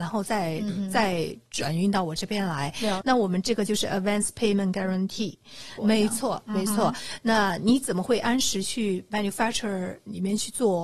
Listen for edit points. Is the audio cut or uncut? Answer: cut